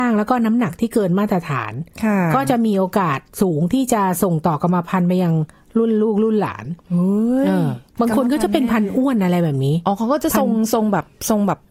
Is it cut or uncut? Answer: cut